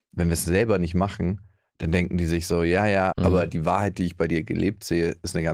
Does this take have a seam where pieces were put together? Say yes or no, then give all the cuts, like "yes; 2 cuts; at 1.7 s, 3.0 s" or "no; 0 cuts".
yes; 1 cut; at 3.1 s